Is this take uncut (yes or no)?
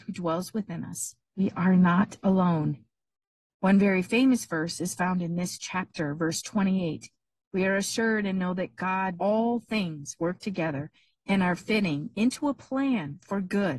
no